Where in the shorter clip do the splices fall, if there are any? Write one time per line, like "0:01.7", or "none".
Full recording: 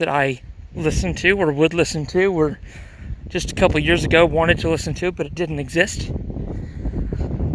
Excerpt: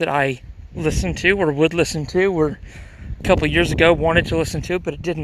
0:03.2